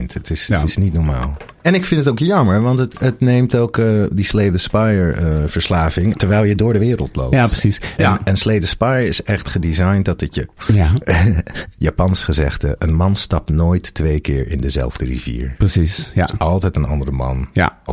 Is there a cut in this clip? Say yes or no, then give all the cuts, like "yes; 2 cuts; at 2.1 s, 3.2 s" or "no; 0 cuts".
yes; 3 cuts; at 6.1 s, 8.0 s, 10.6 s